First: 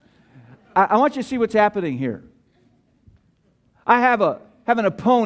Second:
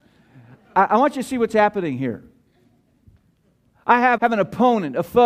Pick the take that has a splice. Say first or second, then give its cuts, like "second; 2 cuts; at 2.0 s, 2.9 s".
second; 1 cut; at 4.2 s